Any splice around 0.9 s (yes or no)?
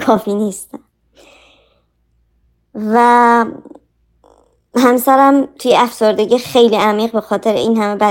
no